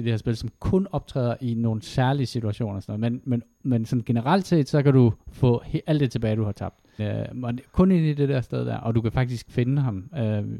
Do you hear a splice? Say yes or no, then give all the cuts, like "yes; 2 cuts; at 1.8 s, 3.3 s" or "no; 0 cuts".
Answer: yes; 1 cut; at 7.0 s